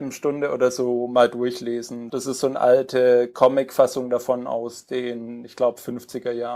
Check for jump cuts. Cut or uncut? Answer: cut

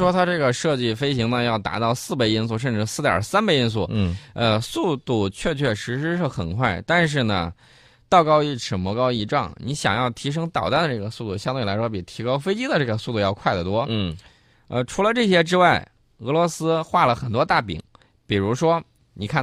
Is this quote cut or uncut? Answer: uncut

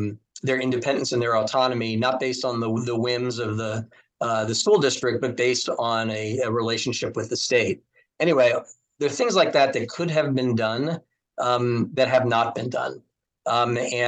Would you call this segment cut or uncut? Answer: uncut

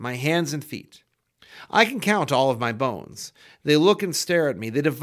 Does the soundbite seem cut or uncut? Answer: uncut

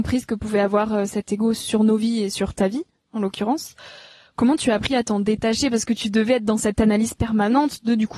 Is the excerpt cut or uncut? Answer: uncut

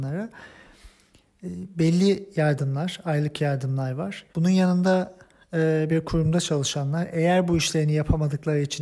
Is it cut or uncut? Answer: cut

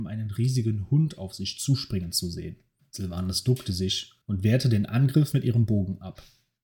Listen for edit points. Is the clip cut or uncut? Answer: cut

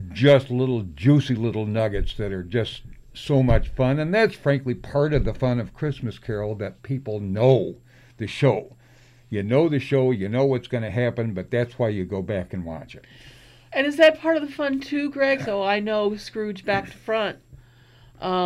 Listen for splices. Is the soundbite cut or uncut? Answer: cut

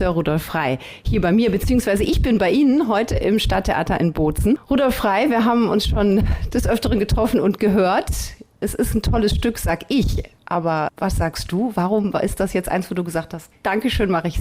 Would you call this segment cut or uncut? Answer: uncut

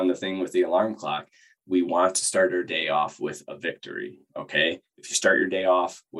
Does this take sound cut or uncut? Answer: uncut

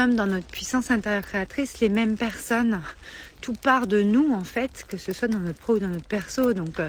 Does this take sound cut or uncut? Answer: uncut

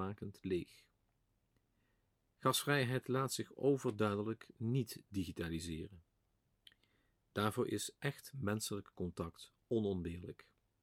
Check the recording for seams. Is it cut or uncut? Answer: uncut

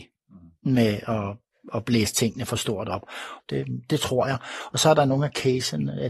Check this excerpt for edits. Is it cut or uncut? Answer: cut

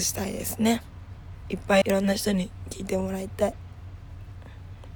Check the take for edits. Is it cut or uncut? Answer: cut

